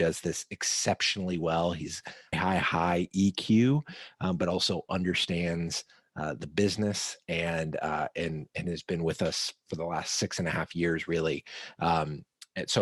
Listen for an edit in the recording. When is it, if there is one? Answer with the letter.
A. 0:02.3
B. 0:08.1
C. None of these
A